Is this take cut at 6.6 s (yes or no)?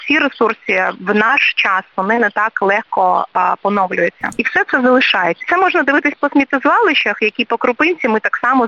no